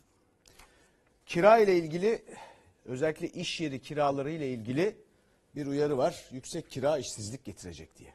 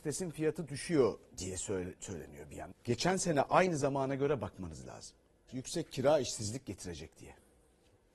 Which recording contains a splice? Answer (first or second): second